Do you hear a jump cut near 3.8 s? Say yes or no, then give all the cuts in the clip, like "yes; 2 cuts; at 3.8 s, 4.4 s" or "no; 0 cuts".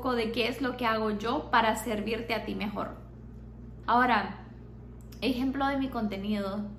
yes; 1 cut; at 3.8 s